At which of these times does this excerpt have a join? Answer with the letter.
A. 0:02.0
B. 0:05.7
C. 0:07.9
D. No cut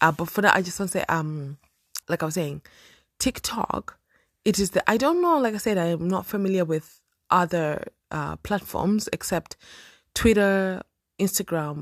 A